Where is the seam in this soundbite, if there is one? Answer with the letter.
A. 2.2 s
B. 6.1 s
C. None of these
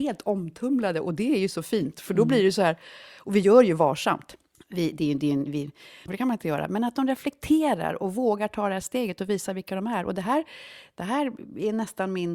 B